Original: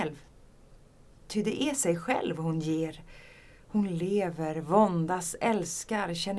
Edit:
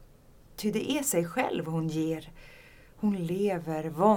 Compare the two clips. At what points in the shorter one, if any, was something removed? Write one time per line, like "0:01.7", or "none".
none